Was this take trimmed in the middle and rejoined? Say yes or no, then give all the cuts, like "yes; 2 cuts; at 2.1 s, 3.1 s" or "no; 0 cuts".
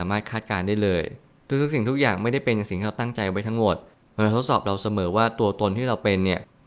no; 0 cuts